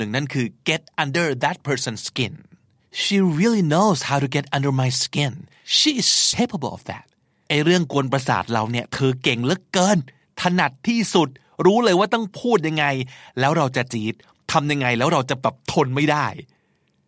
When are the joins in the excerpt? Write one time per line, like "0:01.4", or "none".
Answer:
0:06.3